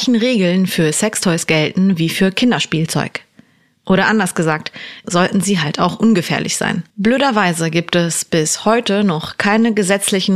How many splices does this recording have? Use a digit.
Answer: 2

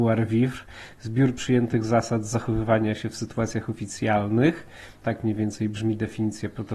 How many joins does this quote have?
1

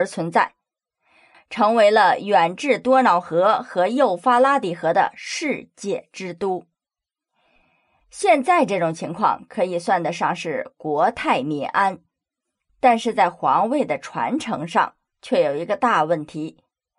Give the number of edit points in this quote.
1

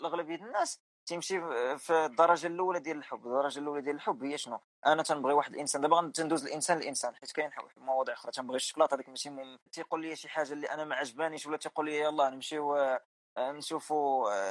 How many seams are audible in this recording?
1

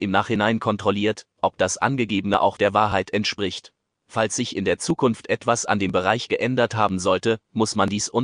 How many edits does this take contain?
1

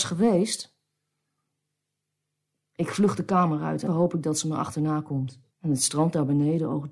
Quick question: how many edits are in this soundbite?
2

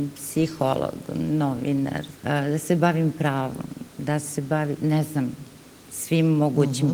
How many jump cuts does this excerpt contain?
2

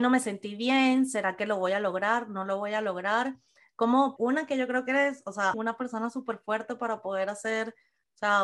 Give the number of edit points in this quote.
2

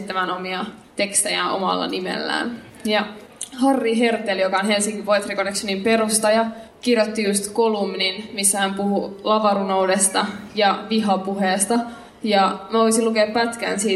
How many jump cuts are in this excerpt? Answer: 0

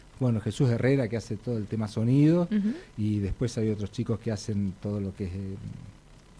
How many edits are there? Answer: 0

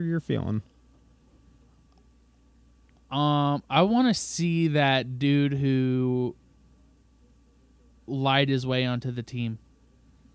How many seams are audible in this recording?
0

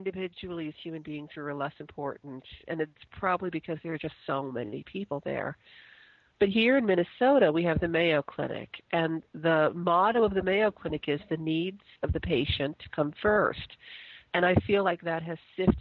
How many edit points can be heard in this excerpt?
0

